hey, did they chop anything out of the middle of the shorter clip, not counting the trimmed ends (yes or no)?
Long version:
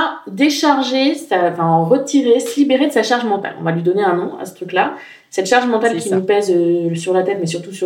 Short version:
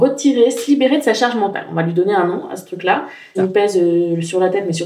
yes